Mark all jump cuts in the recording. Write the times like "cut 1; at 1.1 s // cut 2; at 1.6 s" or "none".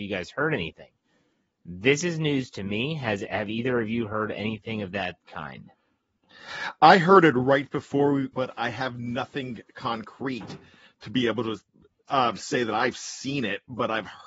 cut 1; at 8.3 s